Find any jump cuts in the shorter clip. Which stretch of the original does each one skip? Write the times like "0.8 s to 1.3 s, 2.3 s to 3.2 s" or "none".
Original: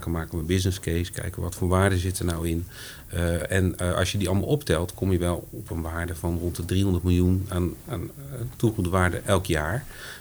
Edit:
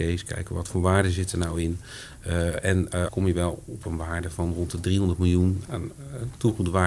3.9 s to 4.9 s, 7.5 s to 7.8 s